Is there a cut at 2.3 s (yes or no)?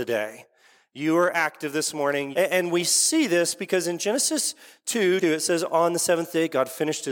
yes